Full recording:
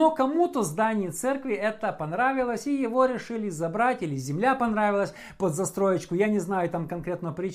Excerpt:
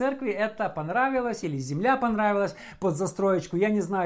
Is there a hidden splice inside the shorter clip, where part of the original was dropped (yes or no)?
yes